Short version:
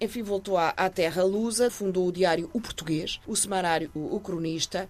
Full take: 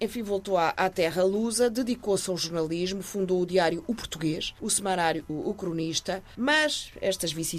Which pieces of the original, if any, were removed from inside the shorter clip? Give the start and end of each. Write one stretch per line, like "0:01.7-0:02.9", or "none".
0:01.7-0:03.0